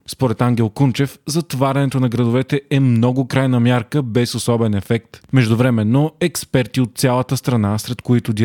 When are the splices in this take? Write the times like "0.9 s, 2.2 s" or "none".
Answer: 5.3 s